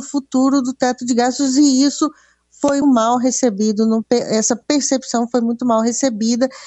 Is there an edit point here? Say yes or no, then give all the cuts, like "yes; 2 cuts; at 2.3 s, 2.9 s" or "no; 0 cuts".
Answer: yes; 1 cut; at 2.8 s